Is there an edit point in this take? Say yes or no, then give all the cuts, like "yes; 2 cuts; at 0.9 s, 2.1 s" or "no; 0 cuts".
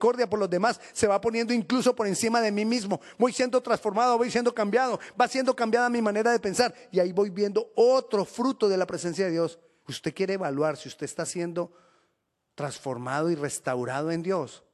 yes; 1 cut; at 9.8 s